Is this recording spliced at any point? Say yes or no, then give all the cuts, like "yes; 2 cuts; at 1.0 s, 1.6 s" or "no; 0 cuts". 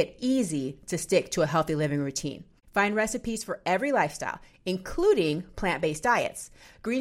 no; 0 cuts